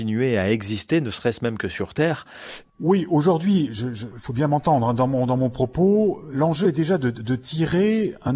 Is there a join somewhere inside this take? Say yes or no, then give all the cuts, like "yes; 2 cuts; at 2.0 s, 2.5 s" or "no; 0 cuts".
yes; 2 cuts; at 2.6 s, 4.1 s